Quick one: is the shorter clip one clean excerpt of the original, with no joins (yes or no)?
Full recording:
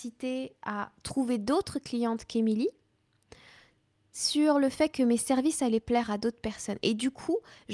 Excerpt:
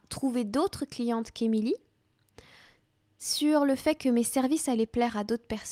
yes